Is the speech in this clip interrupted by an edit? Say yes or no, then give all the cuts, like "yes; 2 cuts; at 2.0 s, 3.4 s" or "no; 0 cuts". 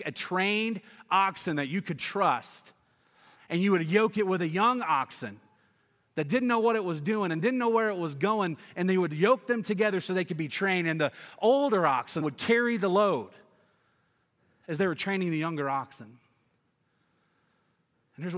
yes; 1 cut; at 12.2 s